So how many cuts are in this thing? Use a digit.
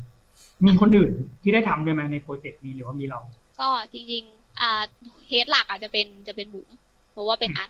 0